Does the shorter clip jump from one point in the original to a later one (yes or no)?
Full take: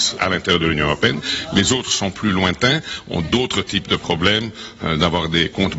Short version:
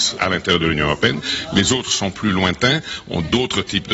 no